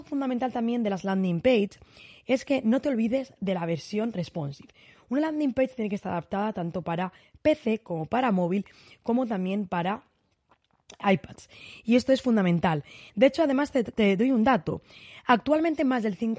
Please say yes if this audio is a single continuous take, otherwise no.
yes